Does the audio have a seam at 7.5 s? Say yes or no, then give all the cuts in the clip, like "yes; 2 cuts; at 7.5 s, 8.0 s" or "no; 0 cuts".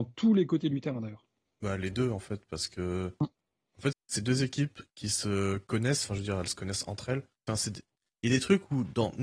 yes; 2 cuts; at 3.9 s, 7.5 s